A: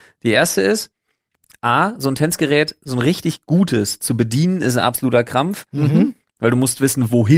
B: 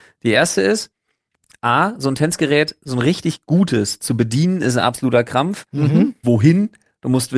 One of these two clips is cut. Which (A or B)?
B